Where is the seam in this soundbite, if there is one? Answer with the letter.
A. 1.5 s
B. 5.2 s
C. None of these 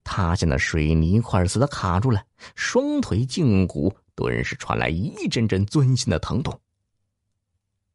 A